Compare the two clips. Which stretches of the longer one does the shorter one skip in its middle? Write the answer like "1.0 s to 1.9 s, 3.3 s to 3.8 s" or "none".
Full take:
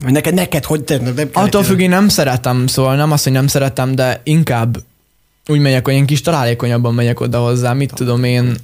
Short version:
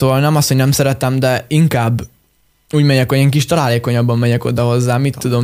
none